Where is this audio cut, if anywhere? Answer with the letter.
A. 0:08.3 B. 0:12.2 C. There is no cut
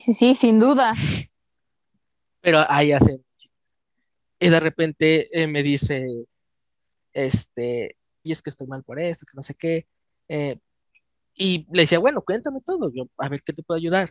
A